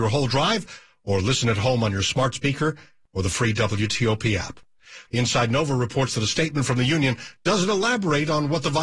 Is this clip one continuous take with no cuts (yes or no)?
no